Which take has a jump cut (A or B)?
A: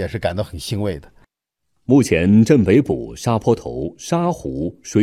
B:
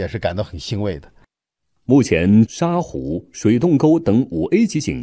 B